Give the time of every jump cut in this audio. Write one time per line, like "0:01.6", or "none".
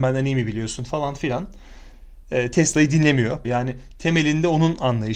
0:03.4